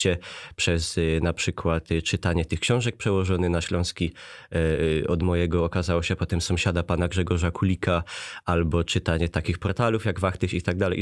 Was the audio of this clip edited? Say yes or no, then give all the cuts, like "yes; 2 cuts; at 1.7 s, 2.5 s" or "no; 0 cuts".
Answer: no; 0 cuts